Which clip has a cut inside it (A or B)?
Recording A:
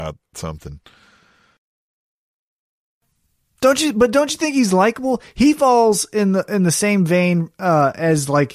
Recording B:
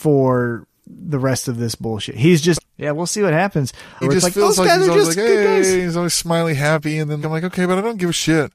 B